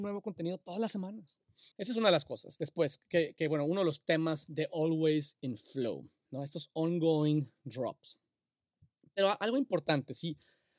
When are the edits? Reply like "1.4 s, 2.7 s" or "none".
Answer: 1.7 s